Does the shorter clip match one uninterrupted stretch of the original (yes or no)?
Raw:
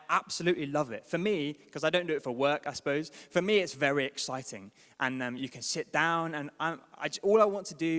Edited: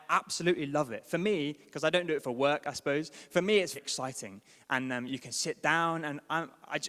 no